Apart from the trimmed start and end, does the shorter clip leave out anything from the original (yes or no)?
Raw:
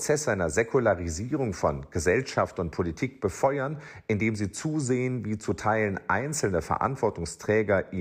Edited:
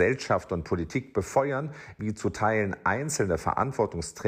yes